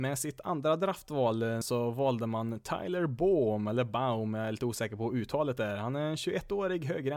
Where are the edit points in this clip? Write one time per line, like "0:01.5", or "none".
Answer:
0:01.6

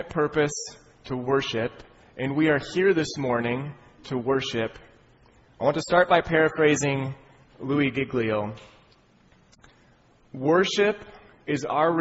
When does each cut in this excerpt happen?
0:05.4

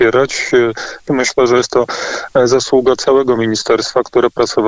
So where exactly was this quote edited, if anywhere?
0:01.1

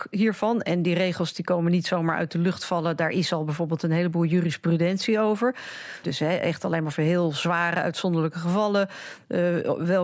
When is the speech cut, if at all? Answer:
0:06.0

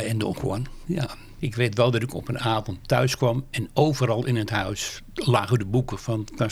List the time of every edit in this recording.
0:01.4

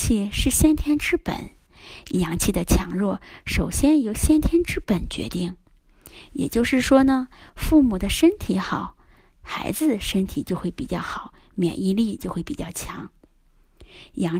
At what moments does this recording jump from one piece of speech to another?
none

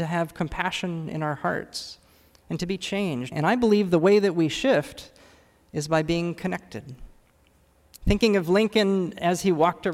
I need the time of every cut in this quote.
0:03.3

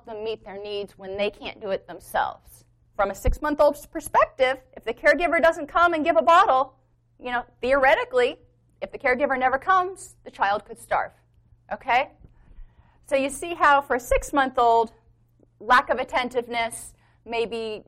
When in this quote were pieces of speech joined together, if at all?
0:02.9

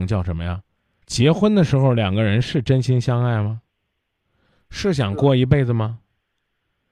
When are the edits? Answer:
0:01.0

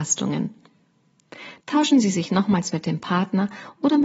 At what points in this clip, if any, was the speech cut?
0:01.6

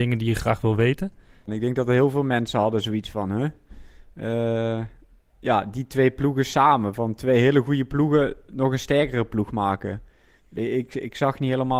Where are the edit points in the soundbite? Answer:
0:01.5

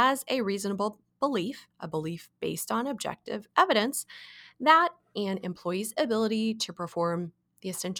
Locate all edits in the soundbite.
0:01.7

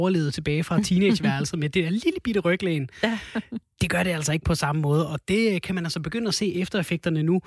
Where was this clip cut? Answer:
none

